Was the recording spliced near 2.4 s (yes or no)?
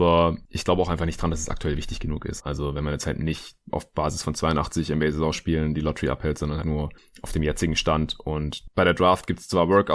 yes